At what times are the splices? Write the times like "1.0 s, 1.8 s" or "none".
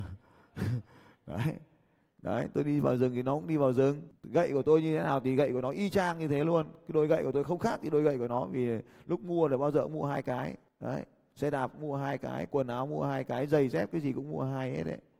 none